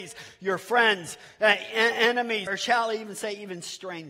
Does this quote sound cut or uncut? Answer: cut